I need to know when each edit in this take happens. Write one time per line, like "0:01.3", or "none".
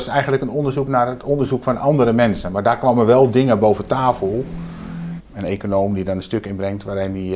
0:05.2

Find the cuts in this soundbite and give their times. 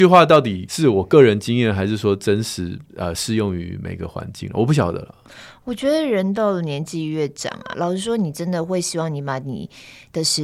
0:07.7

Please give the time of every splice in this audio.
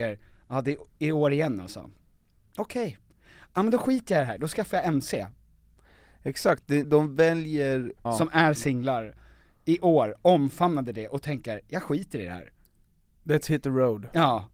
0:06.8
0:08.1

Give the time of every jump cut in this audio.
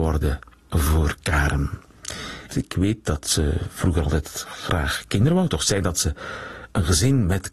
0:02.5

